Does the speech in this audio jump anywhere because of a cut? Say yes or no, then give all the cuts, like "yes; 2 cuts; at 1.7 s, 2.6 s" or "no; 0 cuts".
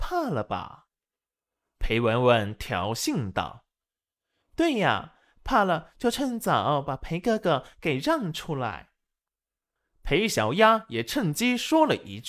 no; 0 cuts